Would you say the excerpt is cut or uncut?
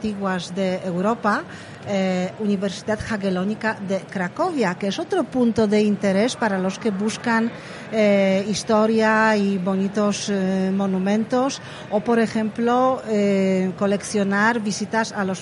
uncut